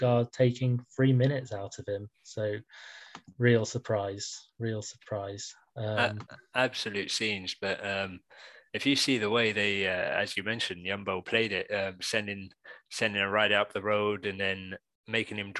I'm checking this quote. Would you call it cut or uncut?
uncut